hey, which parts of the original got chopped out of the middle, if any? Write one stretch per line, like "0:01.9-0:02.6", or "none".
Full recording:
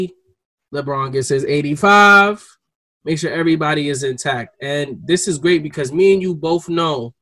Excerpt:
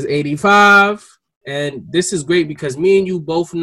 0:02.8-0:04.6